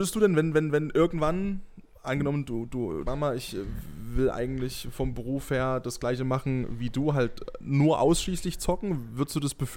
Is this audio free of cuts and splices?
no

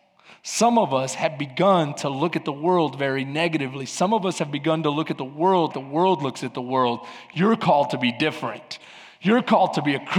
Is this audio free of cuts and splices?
no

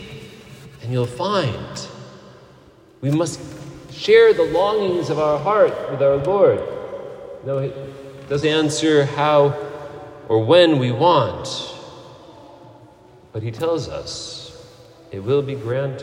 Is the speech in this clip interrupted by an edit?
yes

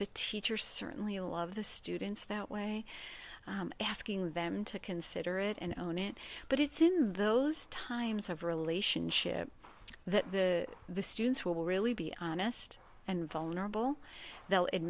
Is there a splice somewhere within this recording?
no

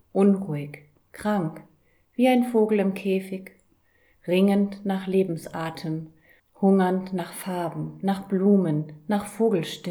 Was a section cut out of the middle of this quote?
yes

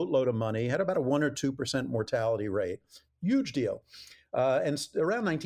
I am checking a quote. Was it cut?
no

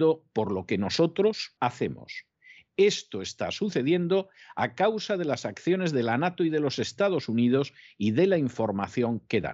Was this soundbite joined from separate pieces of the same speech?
yes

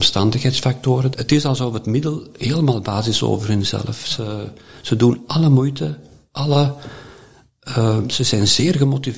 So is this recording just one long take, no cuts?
no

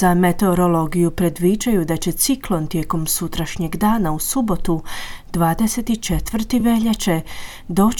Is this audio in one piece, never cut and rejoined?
yes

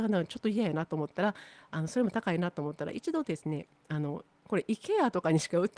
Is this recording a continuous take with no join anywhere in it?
yes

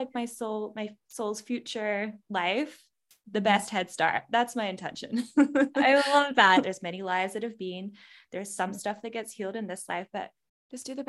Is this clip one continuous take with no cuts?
no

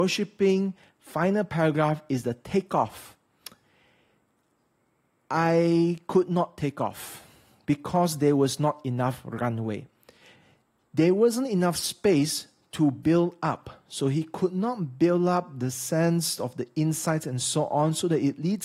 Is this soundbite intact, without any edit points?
yes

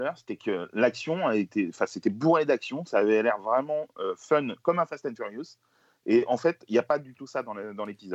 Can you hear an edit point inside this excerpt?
no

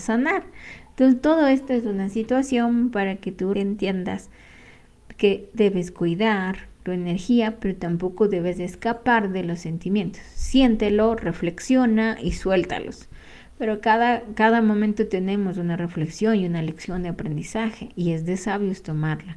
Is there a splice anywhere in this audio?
yes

